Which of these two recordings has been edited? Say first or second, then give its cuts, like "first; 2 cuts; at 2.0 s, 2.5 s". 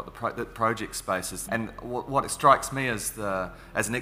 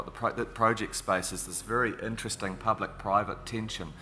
first; 1 cut; at 1.5 s